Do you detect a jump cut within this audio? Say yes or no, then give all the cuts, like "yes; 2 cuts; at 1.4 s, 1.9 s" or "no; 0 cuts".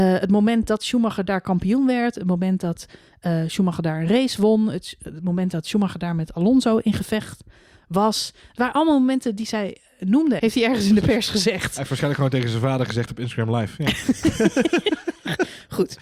yes; 1 cut; at 10.4 s